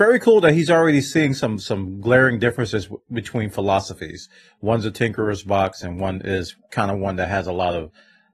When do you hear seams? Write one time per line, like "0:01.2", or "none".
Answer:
none